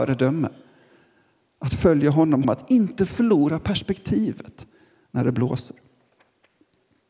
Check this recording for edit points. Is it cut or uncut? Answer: cut